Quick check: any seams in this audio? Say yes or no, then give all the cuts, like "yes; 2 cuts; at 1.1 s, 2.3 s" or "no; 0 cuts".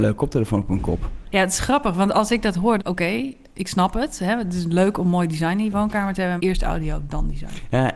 yes; 2 cuts; at 2.8 s, 6.4 s